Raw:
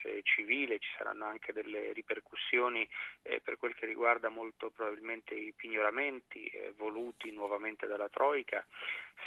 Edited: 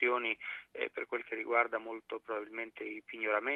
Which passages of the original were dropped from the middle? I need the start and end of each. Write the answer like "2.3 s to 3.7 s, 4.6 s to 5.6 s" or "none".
none